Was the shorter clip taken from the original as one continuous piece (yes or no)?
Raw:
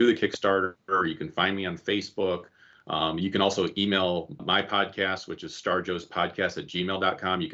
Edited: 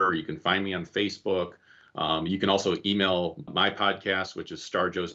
yes